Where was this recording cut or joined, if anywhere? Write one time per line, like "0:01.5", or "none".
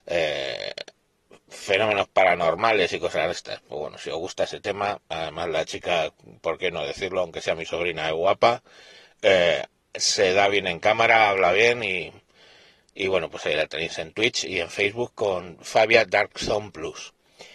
none

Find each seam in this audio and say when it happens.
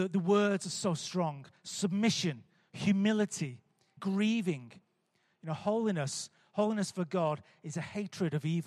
0:04.0

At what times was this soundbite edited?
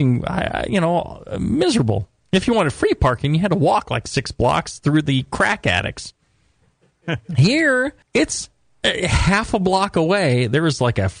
0:08.0

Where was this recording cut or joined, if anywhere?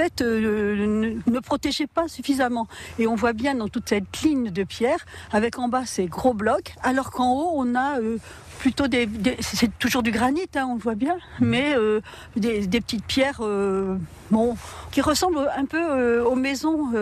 none

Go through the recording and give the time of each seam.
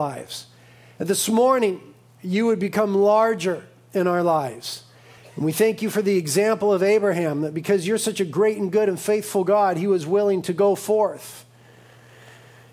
0:05.2

